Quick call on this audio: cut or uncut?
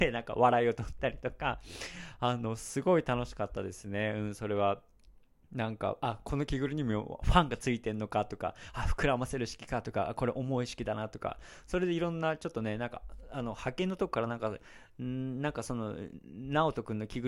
uncut